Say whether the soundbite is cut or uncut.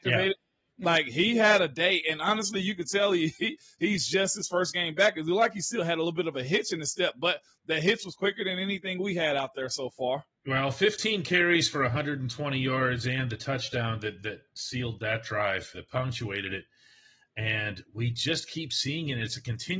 cut